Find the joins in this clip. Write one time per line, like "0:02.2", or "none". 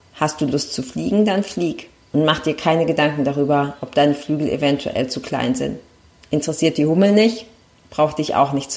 none